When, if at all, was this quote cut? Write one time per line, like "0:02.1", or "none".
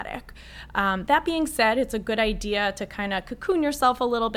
none